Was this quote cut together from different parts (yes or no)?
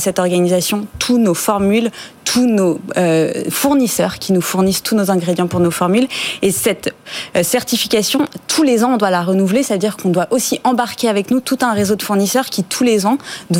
no